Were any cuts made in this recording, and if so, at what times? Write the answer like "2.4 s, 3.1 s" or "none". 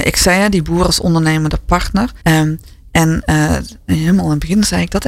2.2 s